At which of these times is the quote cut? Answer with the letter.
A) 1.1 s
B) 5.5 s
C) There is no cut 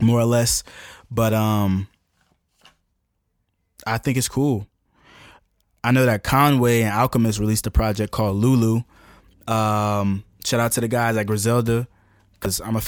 C